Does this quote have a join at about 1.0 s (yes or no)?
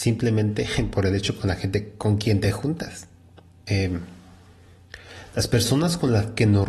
no